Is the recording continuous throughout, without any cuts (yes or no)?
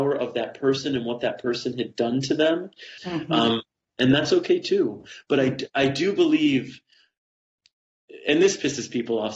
no